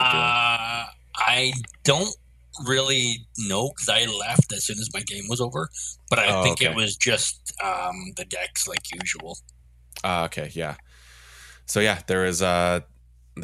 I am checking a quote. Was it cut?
no; 0 cuts

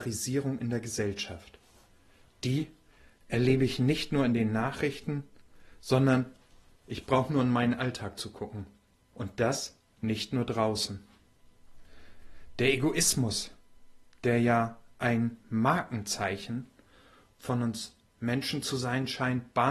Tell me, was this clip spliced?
yes; 1 cut; at 9.1 s

